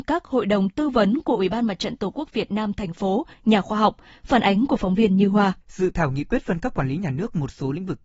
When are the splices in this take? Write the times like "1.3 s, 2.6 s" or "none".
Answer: 3.3 s, 5.6 s